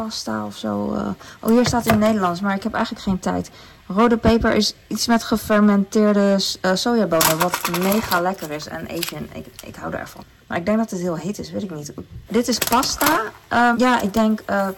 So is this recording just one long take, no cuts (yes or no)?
no